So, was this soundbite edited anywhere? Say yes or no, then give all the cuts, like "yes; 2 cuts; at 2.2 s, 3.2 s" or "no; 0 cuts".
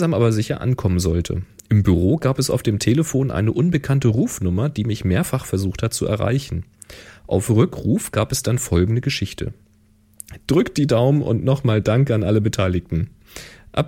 yes; 1 cut; at 10.4 s